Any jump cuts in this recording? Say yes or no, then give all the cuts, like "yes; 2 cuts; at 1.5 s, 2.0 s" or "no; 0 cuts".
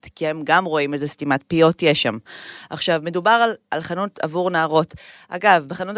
no; 0 cuts